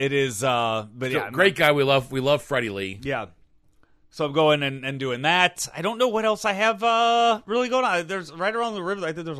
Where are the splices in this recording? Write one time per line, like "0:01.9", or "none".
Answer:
none